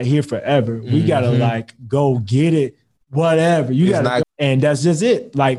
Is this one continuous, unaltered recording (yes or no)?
no